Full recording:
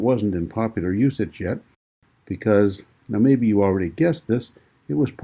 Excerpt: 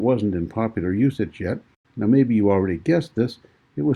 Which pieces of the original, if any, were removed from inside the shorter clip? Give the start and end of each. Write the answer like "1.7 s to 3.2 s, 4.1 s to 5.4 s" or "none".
1.8 s to 3.0 s